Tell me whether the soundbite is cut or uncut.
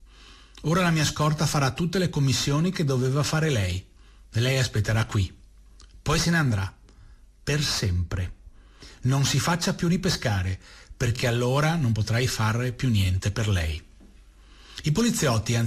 uncut